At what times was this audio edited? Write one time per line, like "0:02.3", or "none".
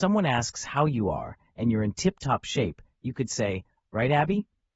0:03.8